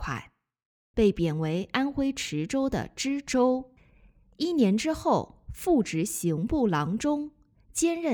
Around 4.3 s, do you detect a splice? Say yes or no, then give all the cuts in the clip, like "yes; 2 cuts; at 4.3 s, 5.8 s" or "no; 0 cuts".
no; 1 cut; at 0.9 s